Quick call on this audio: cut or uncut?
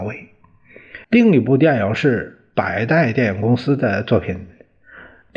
cut